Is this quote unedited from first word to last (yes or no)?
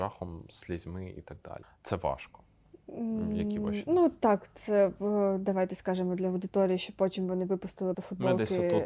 no